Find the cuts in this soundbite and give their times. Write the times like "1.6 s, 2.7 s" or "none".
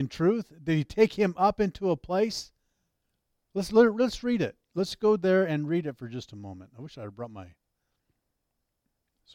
none